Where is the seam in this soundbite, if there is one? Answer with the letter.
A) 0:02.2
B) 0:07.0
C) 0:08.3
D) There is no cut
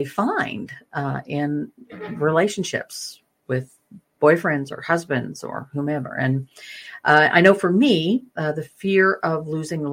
D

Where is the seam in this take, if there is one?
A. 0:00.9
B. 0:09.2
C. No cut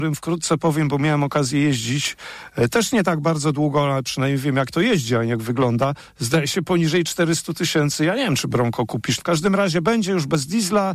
B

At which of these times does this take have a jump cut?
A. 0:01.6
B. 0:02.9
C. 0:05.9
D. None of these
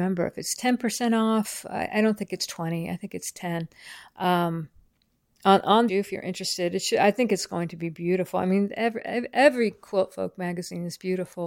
C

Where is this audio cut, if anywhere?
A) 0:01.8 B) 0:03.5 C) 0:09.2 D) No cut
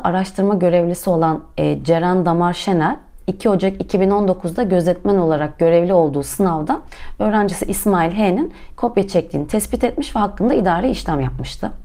D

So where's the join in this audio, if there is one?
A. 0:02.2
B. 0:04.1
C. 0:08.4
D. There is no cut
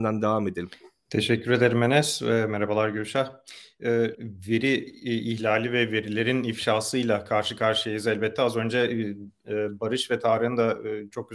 B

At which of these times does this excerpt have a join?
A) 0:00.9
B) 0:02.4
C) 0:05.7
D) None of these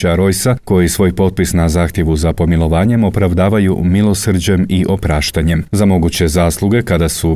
C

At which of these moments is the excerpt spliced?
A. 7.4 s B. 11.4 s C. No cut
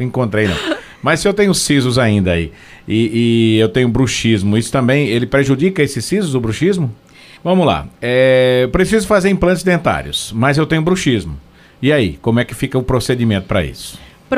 A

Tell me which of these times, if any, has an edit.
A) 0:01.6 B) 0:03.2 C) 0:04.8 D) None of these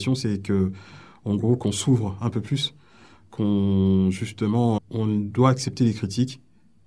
C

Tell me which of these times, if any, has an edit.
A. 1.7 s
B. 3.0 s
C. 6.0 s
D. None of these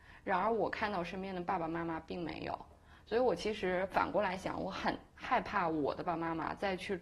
C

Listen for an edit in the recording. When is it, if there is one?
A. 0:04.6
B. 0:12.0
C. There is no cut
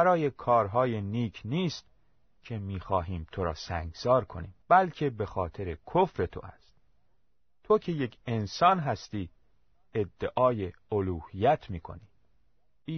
A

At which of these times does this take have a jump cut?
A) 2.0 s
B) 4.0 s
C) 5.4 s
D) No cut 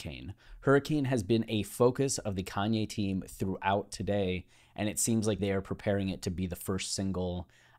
C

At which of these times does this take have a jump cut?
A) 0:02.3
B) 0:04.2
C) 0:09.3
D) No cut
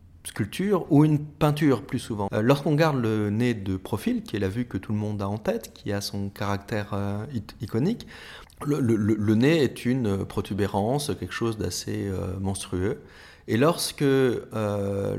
A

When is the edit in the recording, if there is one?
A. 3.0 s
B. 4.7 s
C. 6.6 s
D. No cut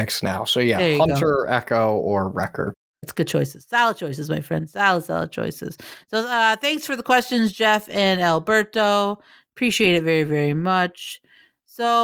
A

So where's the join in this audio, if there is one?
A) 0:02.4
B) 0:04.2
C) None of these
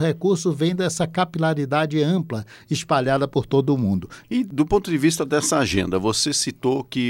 B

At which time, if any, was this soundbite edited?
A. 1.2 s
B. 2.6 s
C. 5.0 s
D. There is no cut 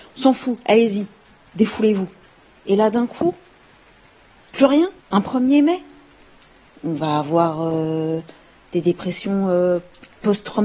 C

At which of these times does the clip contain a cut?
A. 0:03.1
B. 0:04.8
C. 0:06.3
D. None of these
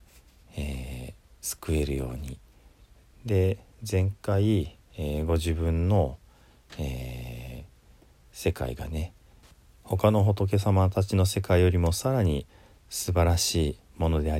A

